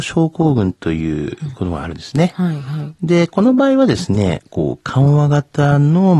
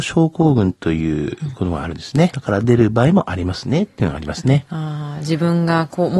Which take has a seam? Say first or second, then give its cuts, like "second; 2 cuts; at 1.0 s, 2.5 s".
second; 1 cut; at 2.3 s